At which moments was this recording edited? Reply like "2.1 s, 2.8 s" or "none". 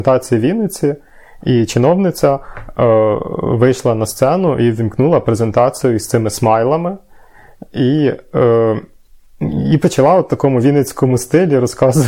none